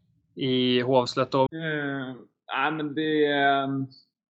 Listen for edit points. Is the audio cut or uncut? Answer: cut